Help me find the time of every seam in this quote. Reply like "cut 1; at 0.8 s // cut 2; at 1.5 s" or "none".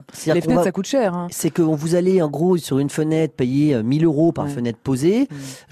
none